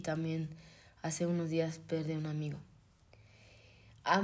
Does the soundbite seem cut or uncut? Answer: uncut